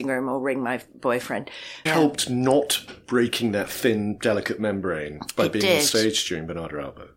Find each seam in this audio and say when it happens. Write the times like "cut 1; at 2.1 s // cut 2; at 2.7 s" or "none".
cut 1; at 1.9 s